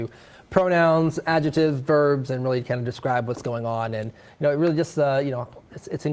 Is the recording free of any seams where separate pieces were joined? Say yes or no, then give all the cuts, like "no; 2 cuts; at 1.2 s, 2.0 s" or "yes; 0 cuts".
yes; 0 cuts